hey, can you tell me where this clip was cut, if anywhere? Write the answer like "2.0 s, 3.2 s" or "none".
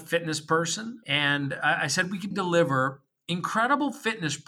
1.0 s, 2.3 s